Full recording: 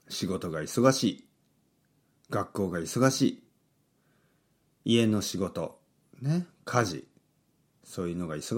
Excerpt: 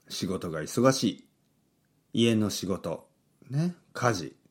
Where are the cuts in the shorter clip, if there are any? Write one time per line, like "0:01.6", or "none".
0:02.0